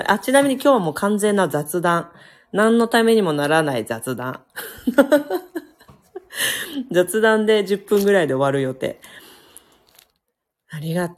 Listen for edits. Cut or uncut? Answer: uncut